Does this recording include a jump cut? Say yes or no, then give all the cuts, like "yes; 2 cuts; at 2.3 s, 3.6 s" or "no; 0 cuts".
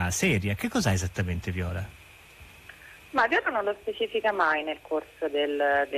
no; 0 cuts